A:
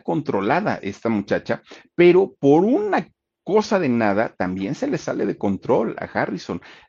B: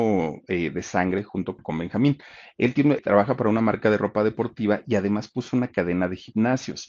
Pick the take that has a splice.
B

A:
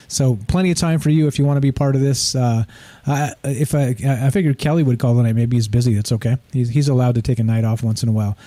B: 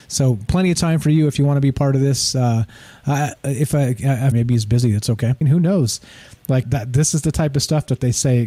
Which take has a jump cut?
B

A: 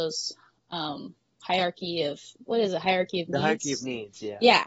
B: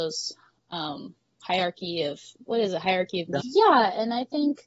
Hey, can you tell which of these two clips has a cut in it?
B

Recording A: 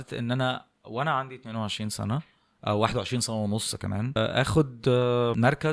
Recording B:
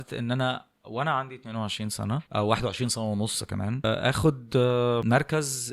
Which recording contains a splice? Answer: B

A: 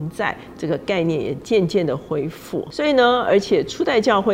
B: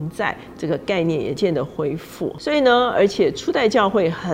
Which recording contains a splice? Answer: B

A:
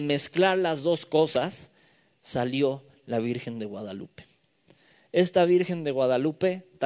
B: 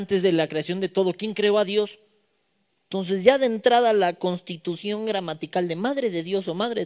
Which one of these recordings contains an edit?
B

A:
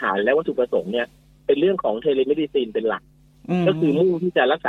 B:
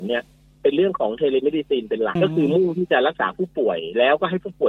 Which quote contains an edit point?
B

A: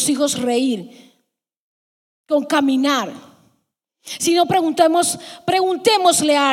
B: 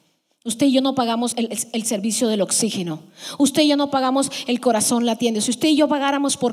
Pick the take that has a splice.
B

